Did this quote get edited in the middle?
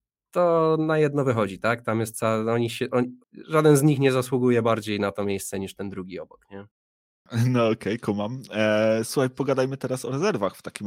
no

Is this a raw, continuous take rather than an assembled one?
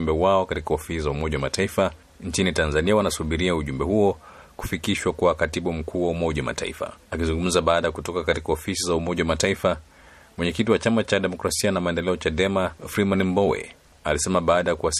no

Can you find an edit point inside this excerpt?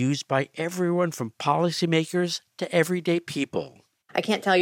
no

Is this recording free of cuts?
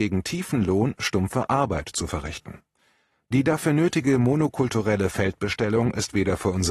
no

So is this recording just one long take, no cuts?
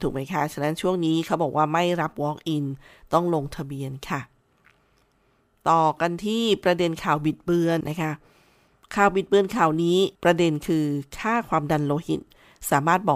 no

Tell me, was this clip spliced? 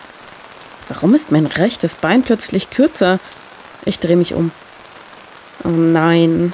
no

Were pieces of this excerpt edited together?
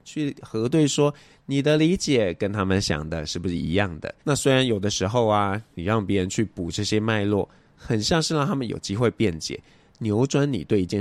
yes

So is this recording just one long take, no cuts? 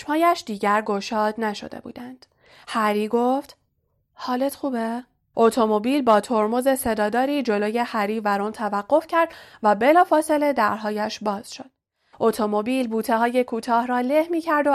no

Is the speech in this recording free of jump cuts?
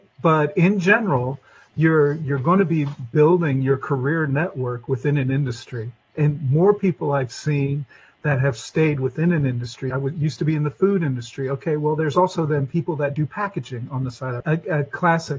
no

